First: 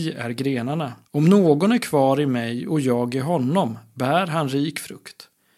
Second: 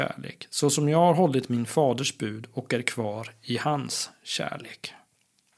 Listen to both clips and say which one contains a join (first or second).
first